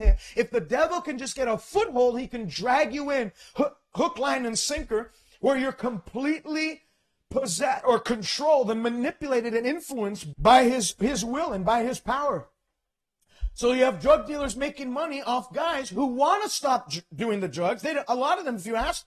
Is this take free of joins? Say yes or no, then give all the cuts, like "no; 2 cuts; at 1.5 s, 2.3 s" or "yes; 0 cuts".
no; 2 cuts; at 7.8 s, 10.3 s